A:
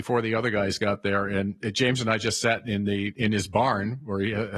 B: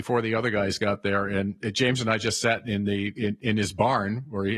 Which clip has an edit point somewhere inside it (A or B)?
A